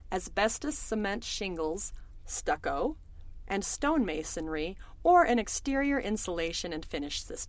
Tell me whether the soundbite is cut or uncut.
cut